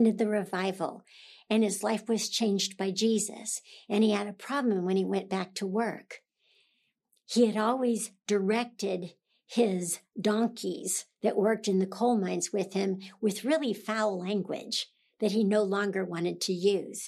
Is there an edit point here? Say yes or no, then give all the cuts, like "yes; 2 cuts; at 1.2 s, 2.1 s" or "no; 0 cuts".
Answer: no; 0 cuts